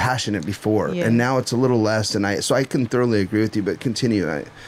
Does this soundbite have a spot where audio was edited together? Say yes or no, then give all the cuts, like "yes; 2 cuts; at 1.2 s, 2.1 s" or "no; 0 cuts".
no; 0 cuts